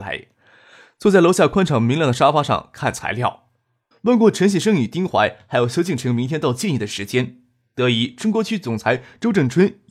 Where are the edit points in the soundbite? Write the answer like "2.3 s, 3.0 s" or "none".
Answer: 3.9 s